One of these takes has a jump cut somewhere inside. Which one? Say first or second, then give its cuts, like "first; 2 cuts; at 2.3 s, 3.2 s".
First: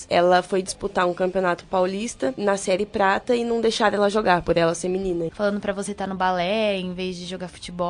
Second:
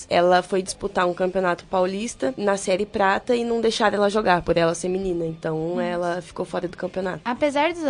first; 1 cut; at 5.3 s